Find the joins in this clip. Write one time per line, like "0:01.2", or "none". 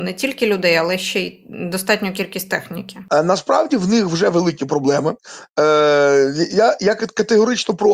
none